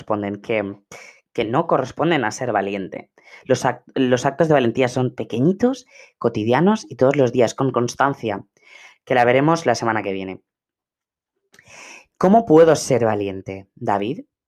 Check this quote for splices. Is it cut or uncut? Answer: uncut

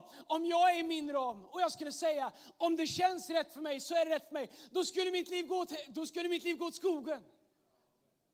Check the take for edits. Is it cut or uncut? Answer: uncut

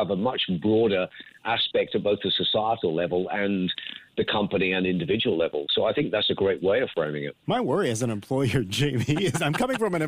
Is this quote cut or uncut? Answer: uncut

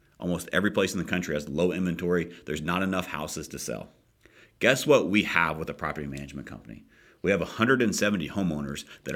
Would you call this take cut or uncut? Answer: uncut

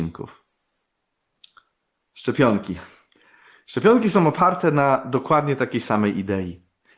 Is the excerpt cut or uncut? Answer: uncut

